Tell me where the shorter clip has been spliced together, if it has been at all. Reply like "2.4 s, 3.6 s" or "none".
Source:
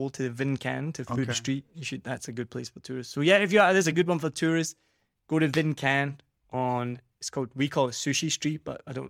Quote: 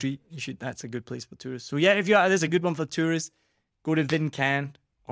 none